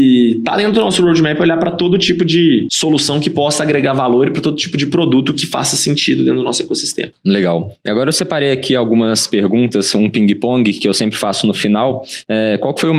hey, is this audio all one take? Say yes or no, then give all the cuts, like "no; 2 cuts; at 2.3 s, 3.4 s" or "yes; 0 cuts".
yes; 0 cuts